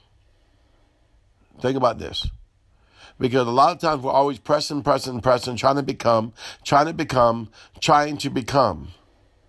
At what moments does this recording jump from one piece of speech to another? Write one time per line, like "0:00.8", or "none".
none